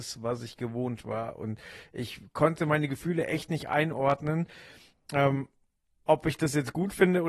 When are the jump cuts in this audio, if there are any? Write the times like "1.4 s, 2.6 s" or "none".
none